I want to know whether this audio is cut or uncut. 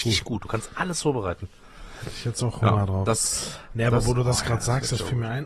uncut